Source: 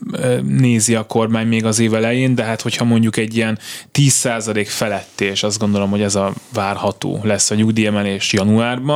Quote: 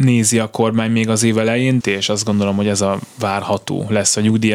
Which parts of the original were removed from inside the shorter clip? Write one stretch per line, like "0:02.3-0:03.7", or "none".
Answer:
0:02.4-0:05.1